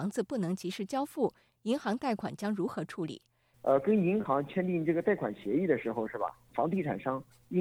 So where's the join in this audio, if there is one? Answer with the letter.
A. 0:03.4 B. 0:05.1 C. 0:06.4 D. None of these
D